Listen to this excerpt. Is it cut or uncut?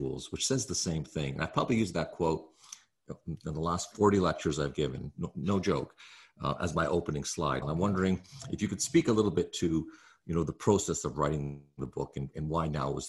cut